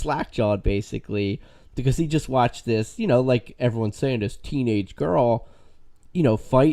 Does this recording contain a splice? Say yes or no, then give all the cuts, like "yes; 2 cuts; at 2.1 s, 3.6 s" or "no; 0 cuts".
no; 0 cuts